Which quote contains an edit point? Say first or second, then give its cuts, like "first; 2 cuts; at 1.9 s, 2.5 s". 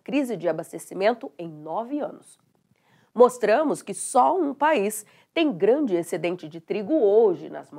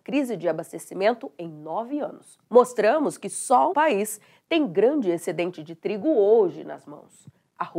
second; 2 cuts; at 2.5 s, 3.7 s